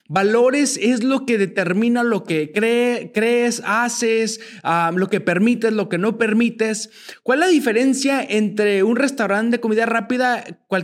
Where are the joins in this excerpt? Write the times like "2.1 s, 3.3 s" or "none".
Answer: none

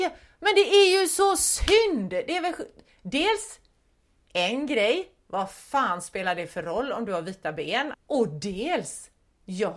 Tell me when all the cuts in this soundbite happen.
7.9 s

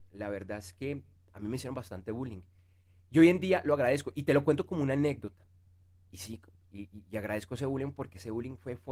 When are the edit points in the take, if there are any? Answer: none

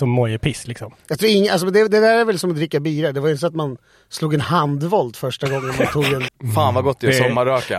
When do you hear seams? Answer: 6.3 s

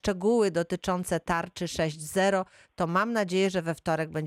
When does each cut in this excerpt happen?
none

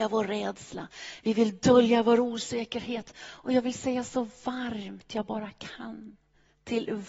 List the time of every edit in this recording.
none

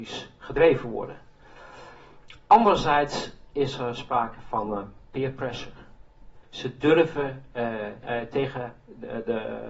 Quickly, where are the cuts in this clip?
6.4 s, 8.0 s

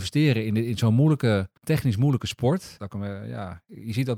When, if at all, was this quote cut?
1.6 s, 2.8 s

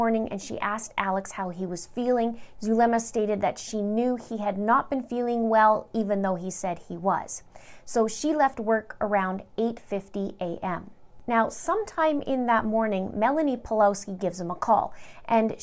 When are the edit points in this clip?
2.5 s

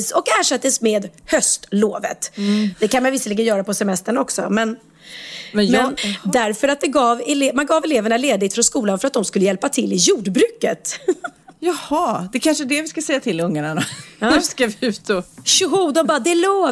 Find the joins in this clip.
2.7 s, 6.0 s

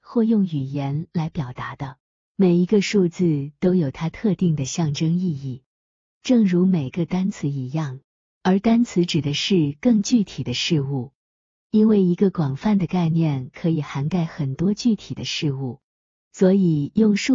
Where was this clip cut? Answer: 8.4 s

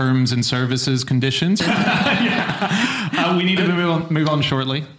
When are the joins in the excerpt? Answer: 1.6 s

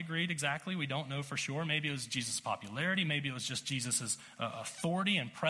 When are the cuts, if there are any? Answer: none

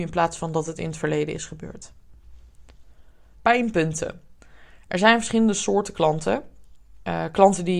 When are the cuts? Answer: 3.3 s

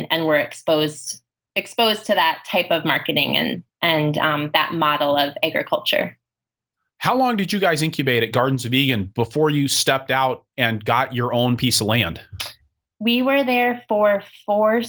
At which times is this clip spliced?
none

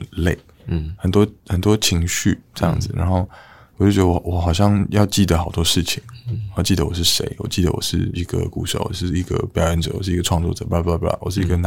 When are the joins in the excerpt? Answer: none

